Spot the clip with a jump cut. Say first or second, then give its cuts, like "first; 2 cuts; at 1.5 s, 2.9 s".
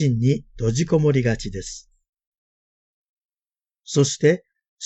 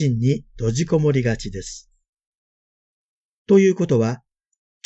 second; 1 cut; at 3.4 s